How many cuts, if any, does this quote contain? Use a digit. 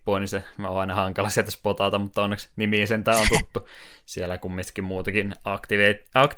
1